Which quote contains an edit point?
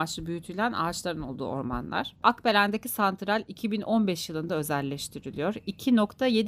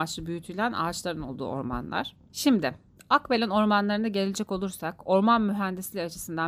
first; 1 cut; at 2.2 s

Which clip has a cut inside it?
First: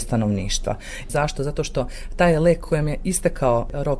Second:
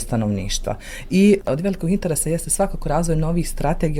first; 1 cut; at 1.1 s

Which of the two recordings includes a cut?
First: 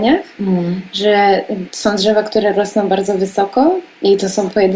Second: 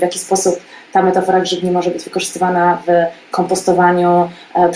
first; 1 cut; at 1.6 s

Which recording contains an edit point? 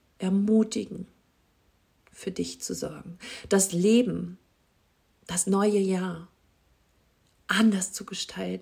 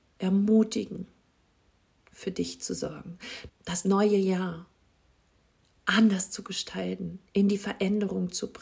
second; 1 cut; at 3.5 s

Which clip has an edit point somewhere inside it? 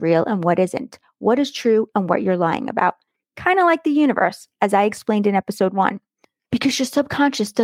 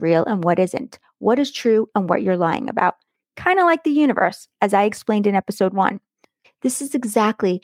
second; 1 cut; at 6.4 s

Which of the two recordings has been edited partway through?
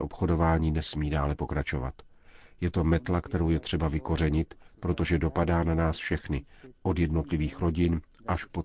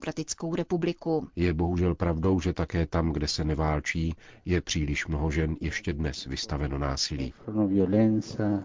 second; 1 cut; at 1.3 s

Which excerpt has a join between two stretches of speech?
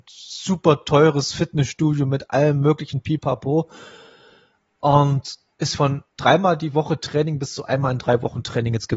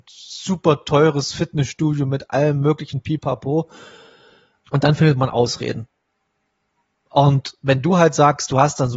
second; 1 cut; at 4.6 s

